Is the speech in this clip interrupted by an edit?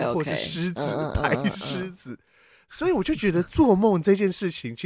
no; 0 cuts

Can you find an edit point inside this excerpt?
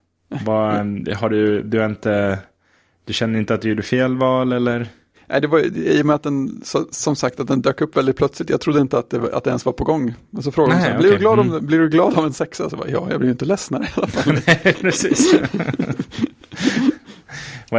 no; 0 cuts

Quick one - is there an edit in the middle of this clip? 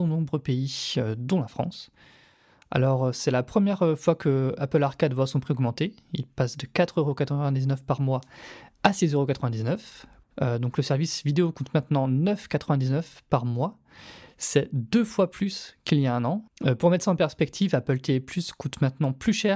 yes; 2 cuts; at 10.2 s, 16.5 s

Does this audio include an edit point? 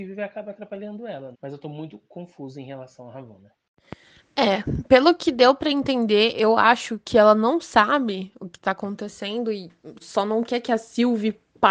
yes; 2 cuts; at 1.3 s, 10.0 s

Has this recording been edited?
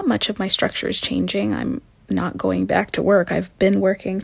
no; 0 cuts

